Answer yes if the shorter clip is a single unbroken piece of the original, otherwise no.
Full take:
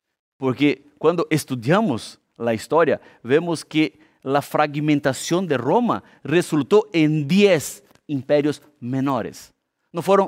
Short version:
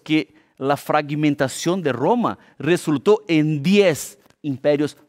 yes